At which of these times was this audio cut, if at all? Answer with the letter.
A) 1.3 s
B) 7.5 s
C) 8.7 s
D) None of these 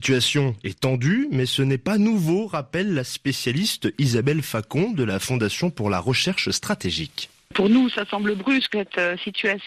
C